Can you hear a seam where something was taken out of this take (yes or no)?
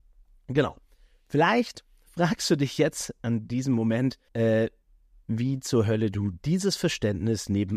yes